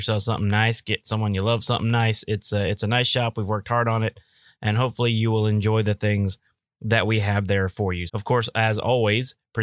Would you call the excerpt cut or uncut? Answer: cut